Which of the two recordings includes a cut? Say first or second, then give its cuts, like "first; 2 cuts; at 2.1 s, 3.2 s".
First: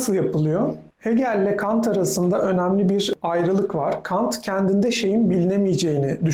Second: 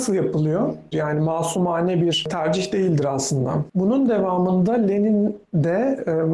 second; 1 cut; at 0.9 s